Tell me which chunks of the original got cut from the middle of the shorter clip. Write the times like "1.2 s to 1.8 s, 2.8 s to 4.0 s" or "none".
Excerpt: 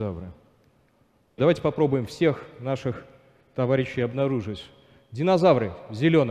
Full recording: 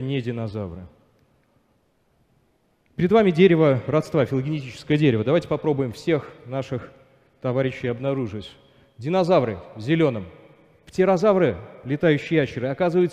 1.9 s to 5.2 s